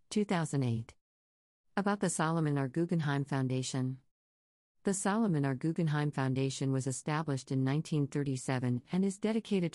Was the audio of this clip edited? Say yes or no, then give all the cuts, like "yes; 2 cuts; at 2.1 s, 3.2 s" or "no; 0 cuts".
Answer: no; 0 cuts